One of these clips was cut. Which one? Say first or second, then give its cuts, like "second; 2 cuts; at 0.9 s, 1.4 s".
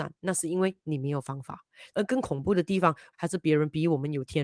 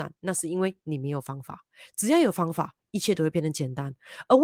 first; 2 cuts; at 1.9 s, 3.1 s